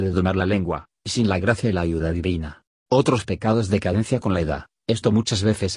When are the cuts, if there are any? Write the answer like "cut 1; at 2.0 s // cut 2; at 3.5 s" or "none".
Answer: cut 1; at 2.8 s